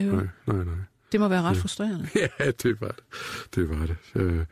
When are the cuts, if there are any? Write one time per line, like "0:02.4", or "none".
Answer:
none